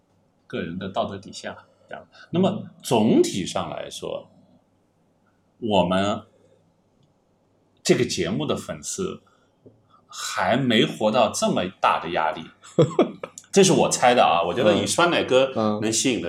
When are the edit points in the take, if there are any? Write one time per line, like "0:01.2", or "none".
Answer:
0:01.9